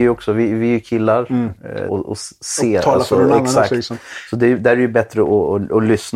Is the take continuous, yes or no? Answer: no